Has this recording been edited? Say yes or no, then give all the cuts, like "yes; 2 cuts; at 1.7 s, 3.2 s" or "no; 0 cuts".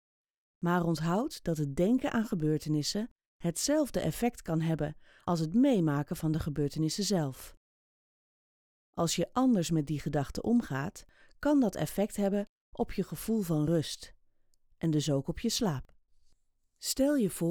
no; 0 cuts